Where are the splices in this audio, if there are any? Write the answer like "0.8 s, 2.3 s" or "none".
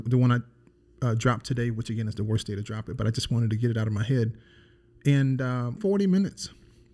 5.8 s